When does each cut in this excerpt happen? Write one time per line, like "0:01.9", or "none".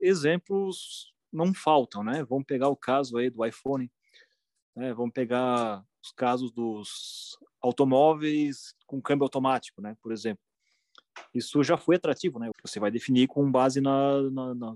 0:12.5